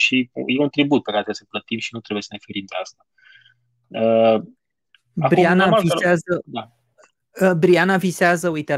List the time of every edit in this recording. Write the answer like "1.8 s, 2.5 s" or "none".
none